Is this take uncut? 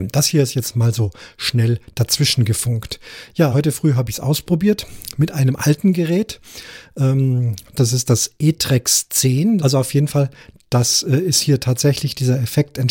no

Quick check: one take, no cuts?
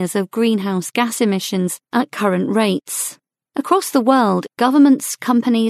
no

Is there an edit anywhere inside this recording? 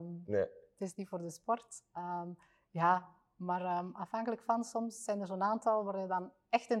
no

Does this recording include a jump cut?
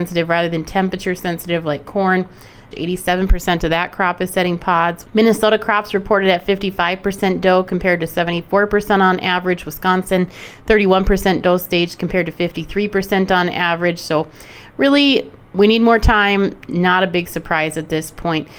yes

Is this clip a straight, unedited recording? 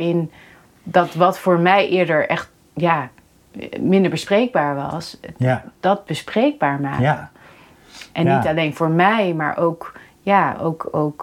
yes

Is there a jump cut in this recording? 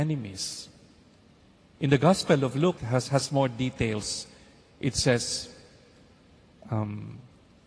yes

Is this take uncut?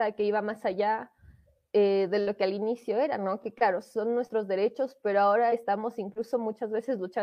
yes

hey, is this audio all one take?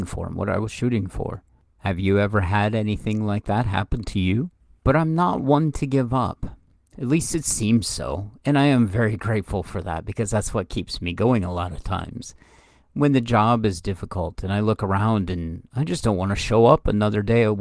no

